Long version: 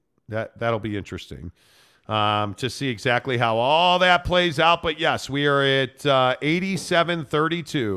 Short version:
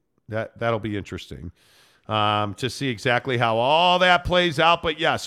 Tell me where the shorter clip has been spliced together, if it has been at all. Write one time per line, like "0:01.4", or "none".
none